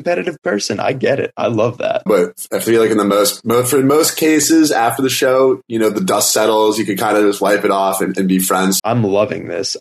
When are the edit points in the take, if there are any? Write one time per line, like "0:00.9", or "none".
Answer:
0:02.1
0:08.8